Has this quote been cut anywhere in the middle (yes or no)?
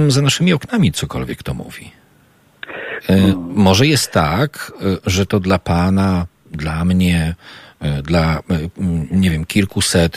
yes